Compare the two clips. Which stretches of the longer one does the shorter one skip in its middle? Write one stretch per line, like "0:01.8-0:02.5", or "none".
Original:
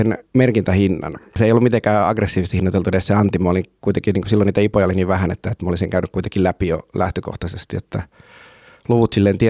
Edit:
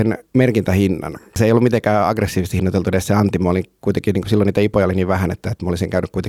none